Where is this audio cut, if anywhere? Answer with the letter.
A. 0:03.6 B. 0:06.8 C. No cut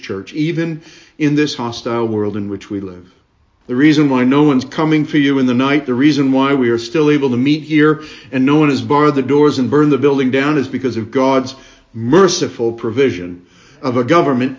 A